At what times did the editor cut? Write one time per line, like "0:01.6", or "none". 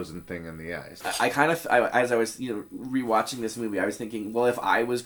0:01.0